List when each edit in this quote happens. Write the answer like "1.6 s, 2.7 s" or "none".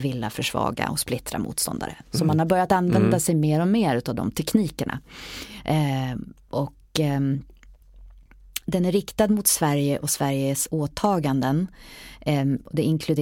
none